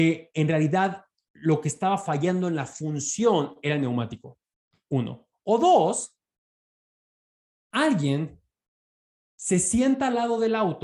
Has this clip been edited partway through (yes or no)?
no